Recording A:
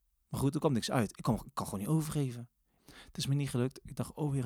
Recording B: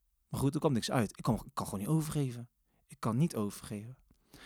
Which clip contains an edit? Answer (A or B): A